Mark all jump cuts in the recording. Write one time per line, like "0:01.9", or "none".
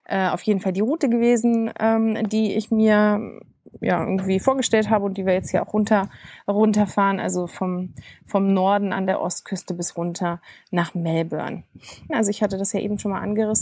0:12.1